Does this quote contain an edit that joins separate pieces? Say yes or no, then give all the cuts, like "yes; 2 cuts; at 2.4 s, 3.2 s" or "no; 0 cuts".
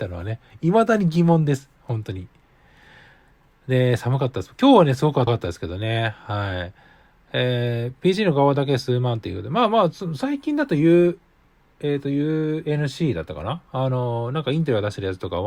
yes; 1 cut; at 5.3 s